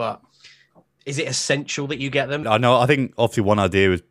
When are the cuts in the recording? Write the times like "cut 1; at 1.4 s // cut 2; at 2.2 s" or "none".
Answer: cut 1; at 2.4 s